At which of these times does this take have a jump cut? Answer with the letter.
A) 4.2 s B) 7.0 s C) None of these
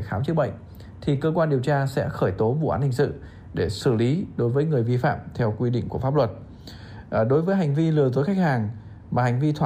C